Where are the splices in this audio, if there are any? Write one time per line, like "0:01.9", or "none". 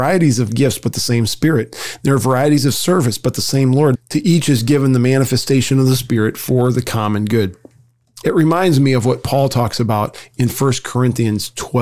0:03.9
0:08.2